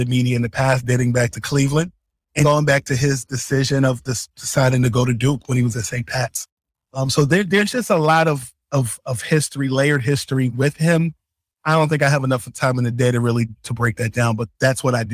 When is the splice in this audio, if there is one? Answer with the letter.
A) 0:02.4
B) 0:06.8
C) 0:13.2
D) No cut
A